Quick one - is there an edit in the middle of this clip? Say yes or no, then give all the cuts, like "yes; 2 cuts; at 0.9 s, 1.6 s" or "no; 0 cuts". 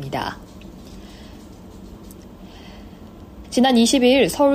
yes; 1 cut; at 3.4 s